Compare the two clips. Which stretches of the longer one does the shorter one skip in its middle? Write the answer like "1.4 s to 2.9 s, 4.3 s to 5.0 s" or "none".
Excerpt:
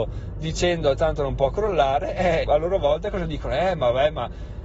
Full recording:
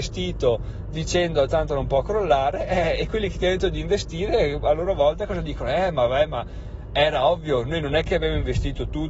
3.0 s to 4.6 s